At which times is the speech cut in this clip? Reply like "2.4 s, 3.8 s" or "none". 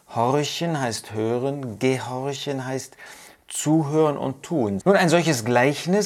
4.8 s